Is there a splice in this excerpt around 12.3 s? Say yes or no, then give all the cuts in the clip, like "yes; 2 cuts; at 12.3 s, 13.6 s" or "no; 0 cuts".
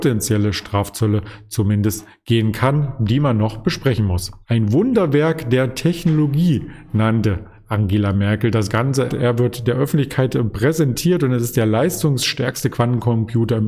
no; 2 cuts; at 4.4 s, 9.1 s